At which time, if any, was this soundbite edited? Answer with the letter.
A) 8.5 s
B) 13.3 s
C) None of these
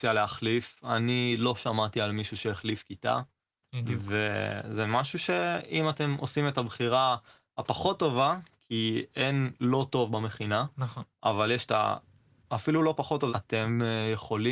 B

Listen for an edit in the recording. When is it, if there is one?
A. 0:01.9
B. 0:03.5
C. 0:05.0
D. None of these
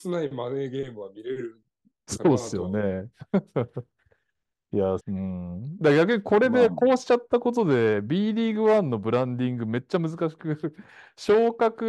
C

